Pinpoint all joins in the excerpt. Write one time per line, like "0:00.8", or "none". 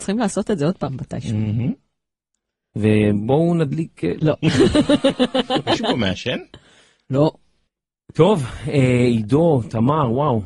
0:04.2